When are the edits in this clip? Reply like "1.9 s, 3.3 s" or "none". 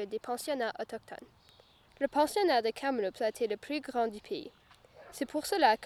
1.9 s